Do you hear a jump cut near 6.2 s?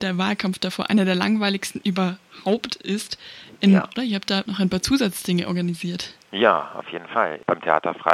no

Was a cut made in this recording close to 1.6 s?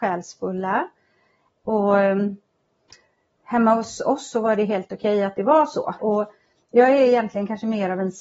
yes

